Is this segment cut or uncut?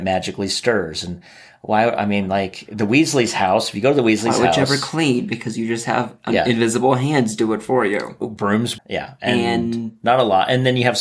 cut